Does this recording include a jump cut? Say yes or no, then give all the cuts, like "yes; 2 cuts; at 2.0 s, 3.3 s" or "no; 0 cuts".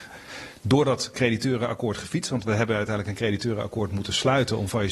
no; 0 cuts